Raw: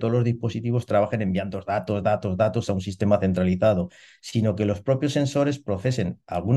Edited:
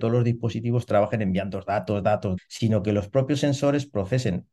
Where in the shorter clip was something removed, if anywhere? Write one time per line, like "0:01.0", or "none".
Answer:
0:02.4